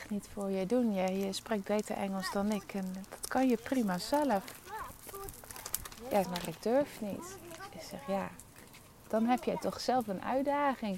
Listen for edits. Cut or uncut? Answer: cut